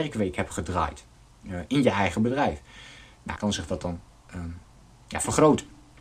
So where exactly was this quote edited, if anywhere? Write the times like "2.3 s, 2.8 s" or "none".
3.4 s